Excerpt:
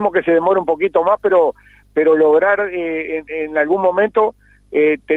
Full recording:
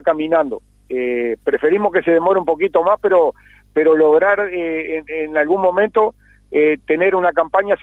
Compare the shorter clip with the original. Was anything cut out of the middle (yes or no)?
no